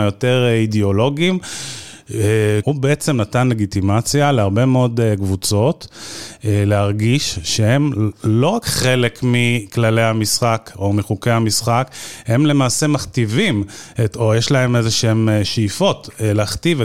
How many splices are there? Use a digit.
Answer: 1